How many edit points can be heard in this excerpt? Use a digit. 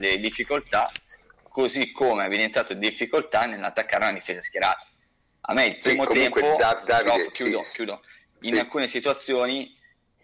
0